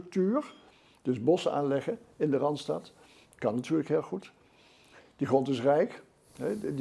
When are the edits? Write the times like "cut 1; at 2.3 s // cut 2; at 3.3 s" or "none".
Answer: none